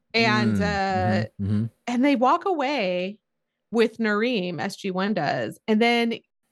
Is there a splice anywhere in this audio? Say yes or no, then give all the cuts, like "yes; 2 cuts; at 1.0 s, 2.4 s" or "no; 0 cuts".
no; 0 cuts